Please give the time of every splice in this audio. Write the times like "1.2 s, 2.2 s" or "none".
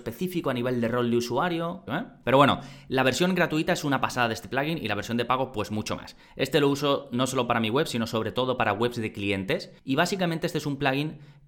1.9 s